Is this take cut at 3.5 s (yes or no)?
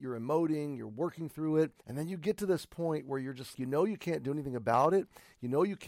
yes